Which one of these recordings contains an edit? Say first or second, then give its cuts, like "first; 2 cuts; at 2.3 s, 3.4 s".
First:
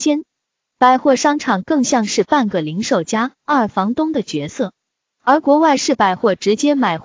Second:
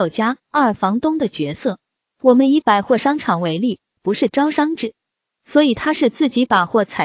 second; 2 cuts; at 2.0 s, 4.0 s